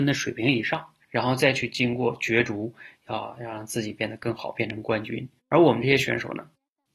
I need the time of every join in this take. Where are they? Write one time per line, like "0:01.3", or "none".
0:01.0
0:05.4